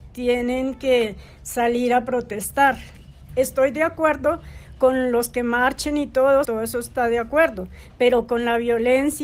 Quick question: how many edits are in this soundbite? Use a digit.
2